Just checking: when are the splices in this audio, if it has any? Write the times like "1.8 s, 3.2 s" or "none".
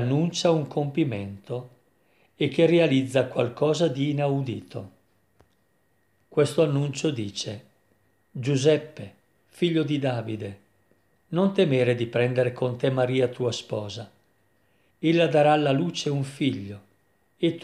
14.9 s